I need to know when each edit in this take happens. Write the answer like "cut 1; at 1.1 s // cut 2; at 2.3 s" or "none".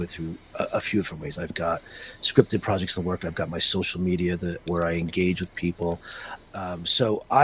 cut 1; at 1.3 s // cut 2; at 4.7 s // cut 3; at 6.5 s

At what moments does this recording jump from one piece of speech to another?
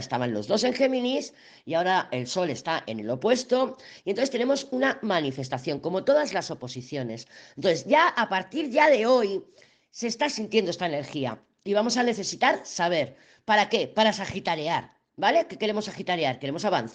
none

